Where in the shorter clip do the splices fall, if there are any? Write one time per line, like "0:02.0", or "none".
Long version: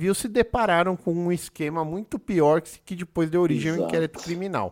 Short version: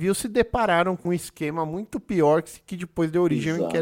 0:01.0